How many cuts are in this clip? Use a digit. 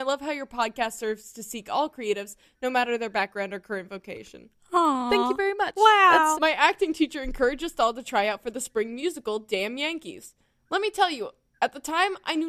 1